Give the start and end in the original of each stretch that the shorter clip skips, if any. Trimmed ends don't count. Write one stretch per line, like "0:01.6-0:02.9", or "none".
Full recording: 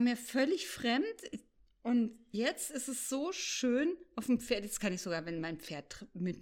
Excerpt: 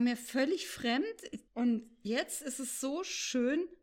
0:01.5-0:01.8

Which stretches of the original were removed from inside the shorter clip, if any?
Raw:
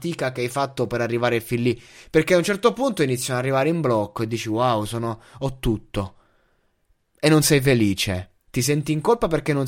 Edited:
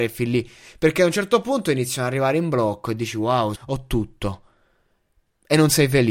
0:04.9-0:05.3

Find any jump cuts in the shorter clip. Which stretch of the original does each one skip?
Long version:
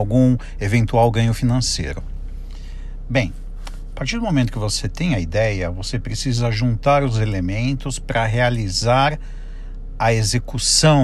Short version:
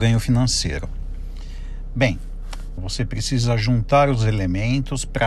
0:03.9-0:05.7

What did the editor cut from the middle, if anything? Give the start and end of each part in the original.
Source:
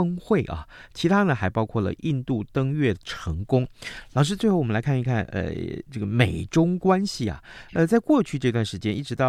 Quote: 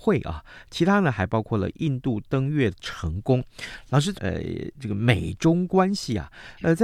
0:04.4-0:05.3

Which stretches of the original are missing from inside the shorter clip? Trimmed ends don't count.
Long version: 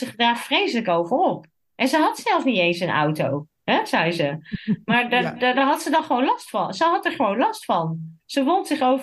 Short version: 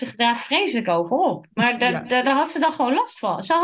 0:01.5-0:04.8

